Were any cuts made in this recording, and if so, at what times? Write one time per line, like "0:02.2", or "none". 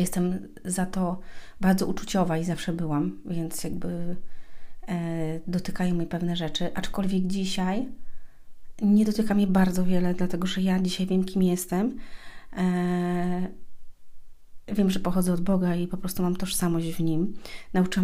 none